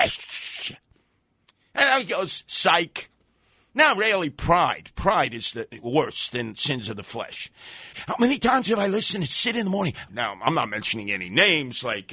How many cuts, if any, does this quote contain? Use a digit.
2